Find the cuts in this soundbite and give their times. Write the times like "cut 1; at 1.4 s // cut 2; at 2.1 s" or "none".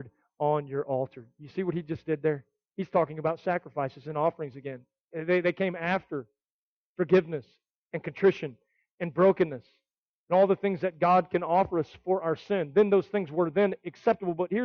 none